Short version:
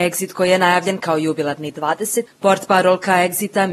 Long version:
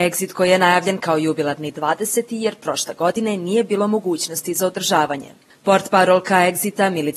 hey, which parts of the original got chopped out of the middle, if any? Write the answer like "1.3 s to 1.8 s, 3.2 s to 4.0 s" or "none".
2.3 s to 5.5 s